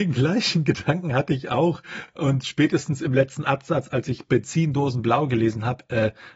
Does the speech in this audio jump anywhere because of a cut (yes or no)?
no